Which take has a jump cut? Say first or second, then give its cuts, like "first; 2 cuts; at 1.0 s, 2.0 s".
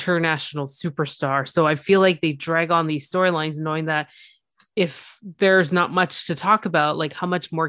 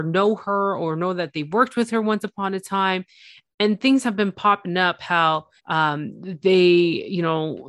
second; 1 cut; at 5.6 s